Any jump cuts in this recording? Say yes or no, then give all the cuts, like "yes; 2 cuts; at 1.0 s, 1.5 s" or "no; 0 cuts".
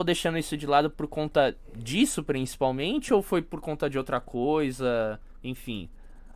no; 0 cuts